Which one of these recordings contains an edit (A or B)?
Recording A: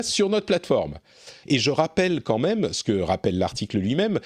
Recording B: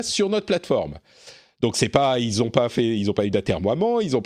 A